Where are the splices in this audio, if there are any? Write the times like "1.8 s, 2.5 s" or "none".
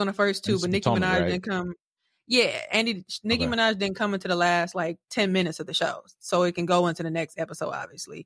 none